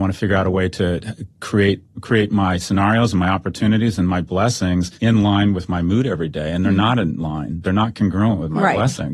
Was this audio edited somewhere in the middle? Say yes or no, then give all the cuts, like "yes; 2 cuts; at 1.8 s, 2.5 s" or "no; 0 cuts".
yes; 1 cut; at 4.9 s